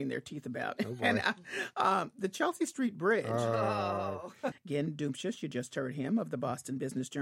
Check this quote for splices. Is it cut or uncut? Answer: cut